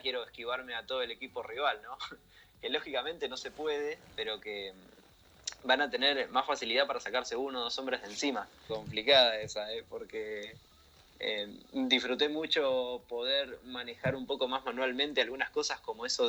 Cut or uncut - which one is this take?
cut